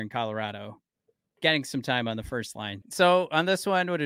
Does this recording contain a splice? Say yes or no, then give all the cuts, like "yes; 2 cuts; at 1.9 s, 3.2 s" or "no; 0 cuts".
yes; 1 cut; at 2.8 s